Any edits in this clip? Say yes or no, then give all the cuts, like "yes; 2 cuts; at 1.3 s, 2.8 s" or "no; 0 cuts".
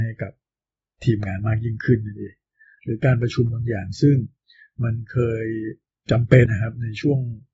yes; 1 cut; at 6.5 s